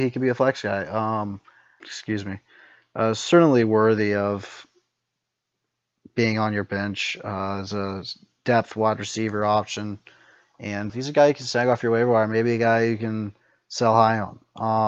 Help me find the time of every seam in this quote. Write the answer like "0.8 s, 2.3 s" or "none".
1.8 s, 10.9 s